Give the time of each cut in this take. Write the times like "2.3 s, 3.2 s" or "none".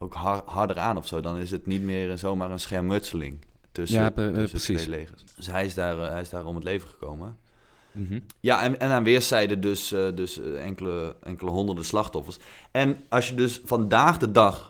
none